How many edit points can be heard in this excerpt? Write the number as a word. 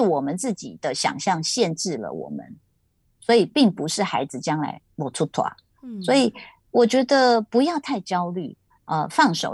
zero